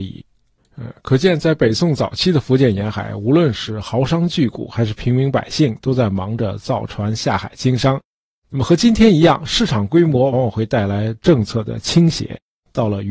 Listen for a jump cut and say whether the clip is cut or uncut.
cut